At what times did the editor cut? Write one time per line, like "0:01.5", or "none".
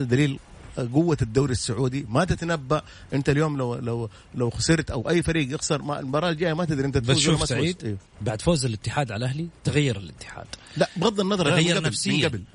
none